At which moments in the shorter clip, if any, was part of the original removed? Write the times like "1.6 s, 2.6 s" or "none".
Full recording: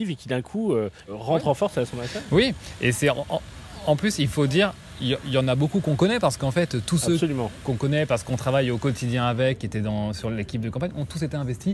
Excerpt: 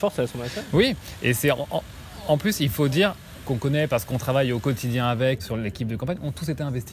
3.3 s, 5.4 s